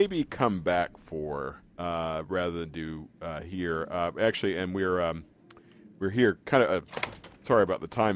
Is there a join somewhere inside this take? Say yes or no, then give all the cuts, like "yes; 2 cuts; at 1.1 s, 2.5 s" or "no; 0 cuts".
yes; 1 cut; at 1.7 s